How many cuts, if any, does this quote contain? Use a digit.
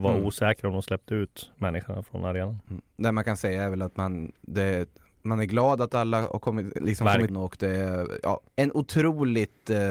2